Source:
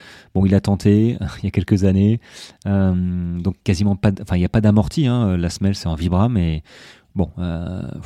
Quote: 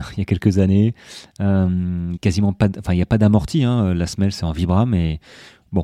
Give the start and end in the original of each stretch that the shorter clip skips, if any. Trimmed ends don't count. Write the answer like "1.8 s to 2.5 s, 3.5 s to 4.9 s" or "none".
3.4 s to 3.6 s

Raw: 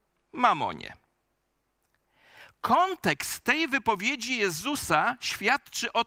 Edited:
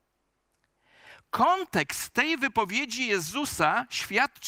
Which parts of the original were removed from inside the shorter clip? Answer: none

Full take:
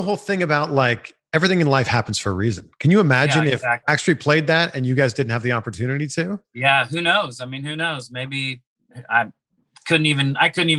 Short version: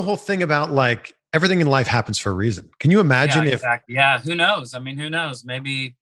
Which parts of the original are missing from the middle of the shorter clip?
3.8 s to 6.5 s

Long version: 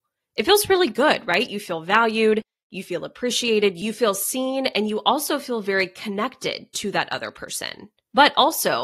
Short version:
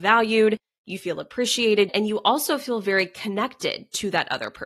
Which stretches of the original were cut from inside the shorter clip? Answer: 3.7 s to 4.7 s

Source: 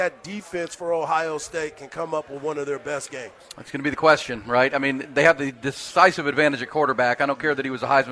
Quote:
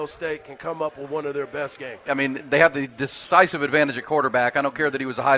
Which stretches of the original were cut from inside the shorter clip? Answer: 3.4 s to 4.7 s

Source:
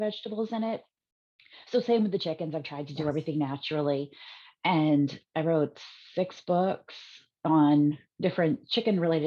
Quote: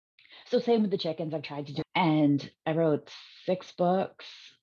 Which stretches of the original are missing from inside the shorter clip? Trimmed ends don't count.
3.0 s to 4.5 s

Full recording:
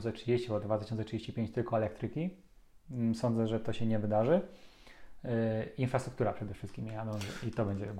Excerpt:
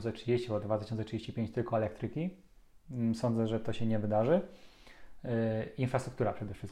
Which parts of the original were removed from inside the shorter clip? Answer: none

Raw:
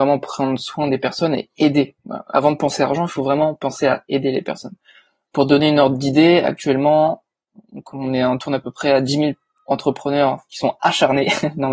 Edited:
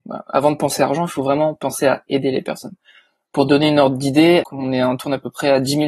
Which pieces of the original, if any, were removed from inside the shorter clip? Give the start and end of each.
6.4 s to 7.8 s

